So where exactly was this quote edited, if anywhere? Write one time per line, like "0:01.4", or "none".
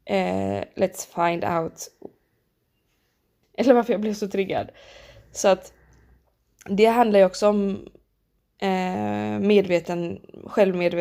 0:03.4